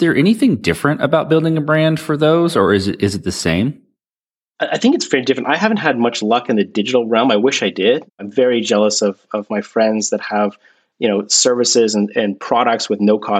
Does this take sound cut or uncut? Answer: uncut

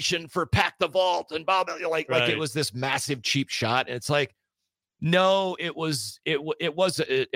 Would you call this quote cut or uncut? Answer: uncut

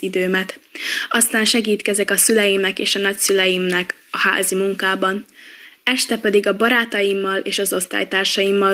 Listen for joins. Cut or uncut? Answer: uncut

